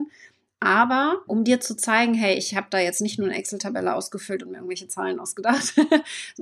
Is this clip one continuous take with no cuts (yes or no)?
no